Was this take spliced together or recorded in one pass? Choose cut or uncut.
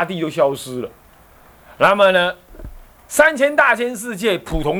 uncut